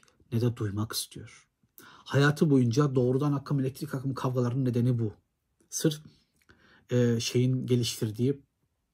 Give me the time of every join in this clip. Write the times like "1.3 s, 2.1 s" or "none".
none